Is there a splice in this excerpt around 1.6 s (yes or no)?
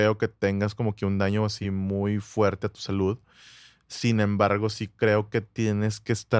no